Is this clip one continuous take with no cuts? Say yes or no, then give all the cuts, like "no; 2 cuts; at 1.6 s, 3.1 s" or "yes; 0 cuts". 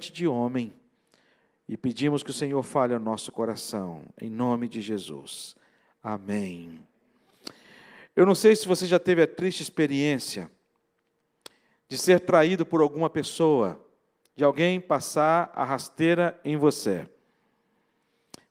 yes; 0 cuts